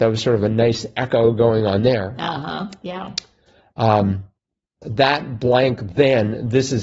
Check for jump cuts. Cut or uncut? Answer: cut